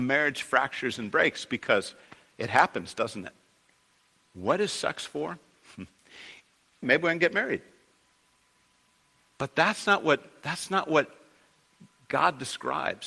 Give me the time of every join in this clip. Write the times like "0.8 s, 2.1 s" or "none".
4.3 s, 6.8 s